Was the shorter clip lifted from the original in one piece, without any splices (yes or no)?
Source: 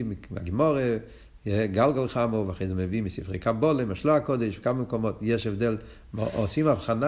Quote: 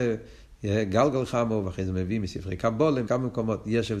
no